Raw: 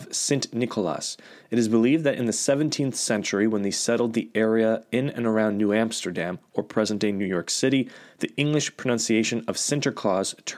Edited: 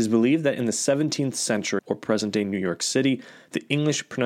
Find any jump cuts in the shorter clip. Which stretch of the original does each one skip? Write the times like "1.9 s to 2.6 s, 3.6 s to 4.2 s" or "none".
3.4 s to 6.5 s